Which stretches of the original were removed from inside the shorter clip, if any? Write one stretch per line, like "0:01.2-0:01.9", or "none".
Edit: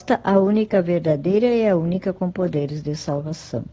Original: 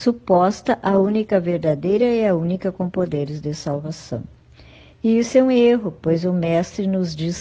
none

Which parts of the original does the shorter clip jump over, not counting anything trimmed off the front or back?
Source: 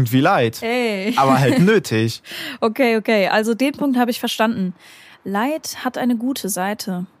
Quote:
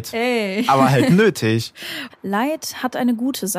0:02.6-0:05.1

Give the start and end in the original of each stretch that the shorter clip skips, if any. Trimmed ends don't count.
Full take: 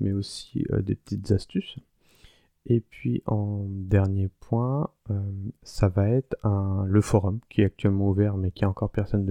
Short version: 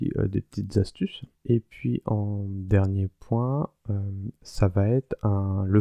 0:01.9-0:02.6

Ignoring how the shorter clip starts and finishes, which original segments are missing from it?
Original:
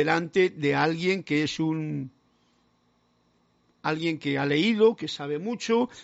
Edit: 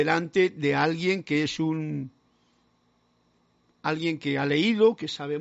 none

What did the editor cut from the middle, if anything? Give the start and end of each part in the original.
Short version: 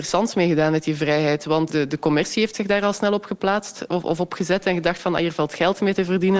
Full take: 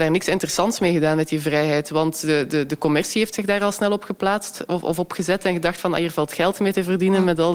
0:02.1-0:02.5

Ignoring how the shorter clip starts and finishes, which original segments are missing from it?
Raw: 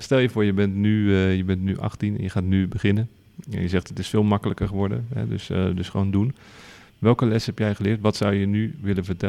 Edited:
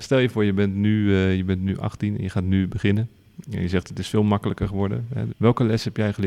0:05.3-0:06.9

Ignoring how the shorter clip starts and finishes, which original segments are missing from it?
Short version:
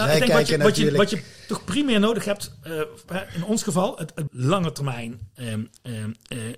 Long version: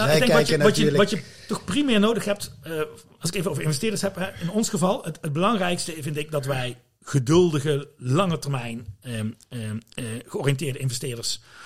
0:03.1-0:04.1
0:05.3-0:07.9

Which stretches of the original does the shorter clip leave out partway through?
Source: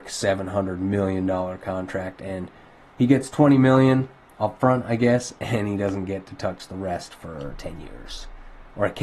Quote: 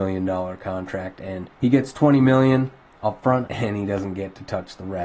0:02.5-0:02.9
0:04.8-0:05.4

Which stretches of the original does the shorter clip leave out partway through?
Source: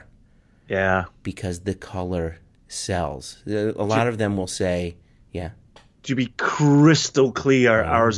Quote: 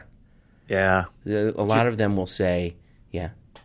0:01.2-0:03.4

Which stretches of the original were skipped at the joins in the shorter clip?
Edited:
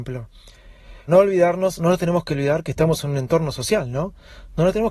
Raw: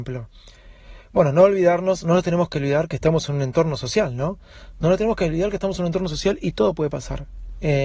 0:01.1-0:01.3

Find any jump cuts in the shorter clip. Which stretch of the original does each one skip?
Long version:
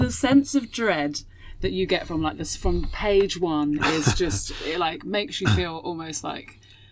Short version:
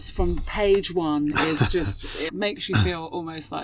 0:04.7-0:05.0

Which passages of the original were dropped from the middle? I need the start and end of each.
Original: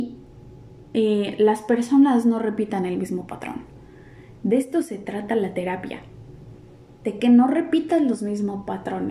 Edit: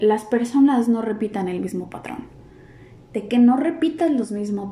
0:04.4-0:06.9

